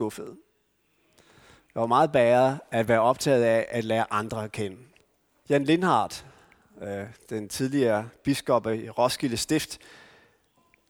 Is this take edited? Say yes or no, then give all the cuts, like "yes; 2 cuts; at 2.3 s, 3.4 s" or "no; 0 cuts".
yes; 1 cut; at 5.4 s